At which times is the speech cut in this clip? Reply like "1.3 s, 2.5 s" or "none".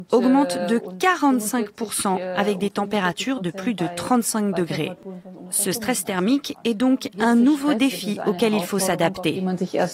none